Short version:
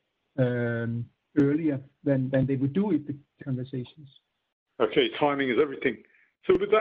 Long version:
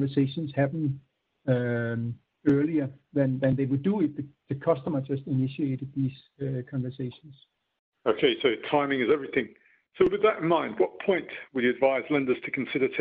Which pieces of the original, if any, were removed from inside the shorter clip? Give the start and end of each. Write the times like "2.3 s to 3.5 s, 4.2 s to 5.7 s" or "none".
4.5 s to 6.6 s, 8.4 s to 8.6 s